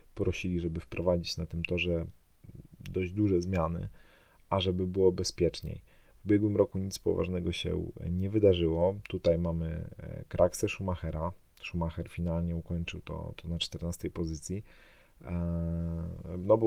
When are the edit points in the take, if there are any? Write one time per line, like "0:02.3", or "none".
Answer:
none